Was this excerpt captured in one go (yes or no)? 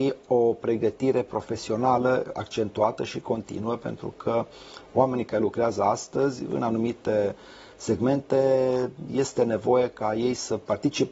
yes